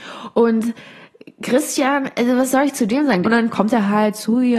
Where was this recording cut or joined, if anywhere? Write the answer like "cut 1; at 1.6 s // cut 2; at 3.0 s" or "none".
cut 1; at 3.2 s